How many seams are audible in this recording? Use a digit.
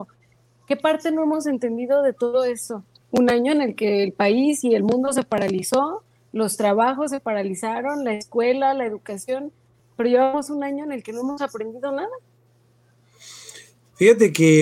1